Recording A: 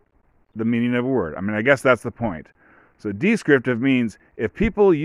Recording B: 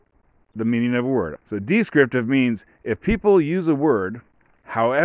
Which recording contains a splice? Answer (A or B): B